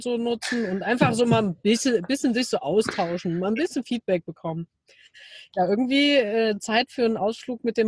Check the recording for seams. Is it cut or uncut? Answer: uncut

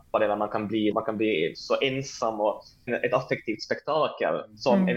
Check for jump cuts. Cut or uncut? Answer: cut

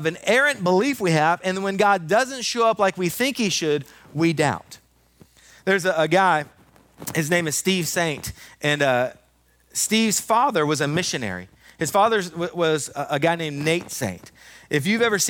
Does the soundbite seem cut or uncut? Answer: uncut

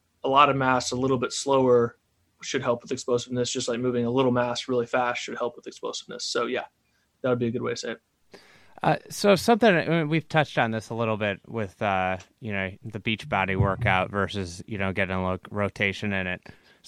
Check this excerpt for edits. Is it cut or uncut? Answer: uncut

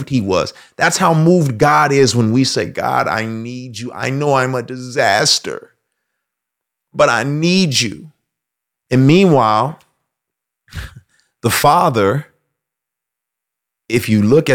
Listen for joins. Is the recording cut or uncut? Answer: cut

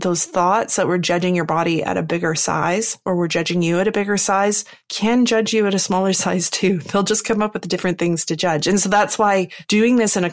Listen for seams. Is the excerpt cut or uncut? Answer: uncut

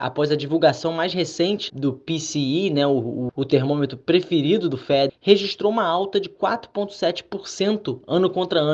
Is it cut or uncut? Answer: cut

